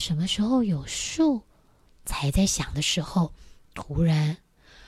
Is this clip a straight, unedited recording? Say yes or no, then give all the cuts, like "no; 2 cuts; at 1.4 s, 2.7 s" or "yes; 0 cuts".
no; 1 cut; at 1.9 s